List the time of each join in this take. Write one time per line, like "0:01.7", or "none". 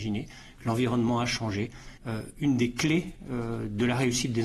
0:02.0